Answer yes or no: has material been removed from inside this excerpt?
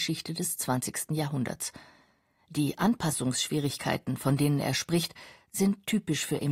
no